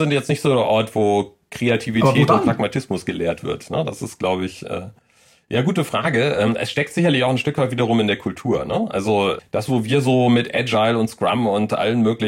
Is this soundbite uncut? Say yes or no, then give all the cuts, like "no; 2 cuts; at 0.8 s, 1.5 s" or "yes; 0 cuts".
yes; 0 cuts